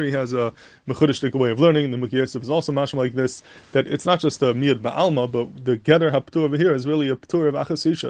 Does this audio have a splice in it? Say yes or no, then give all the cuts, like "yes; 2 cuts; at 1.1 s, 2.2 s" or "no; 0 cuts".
no; 0 cuts